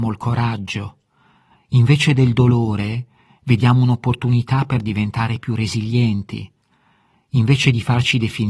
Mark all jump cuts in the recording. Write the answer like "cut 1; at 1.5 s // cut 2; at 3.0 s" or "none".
none